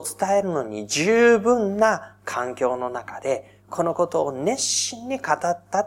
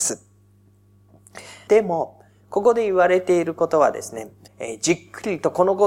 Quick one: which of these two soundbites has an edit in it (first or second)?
second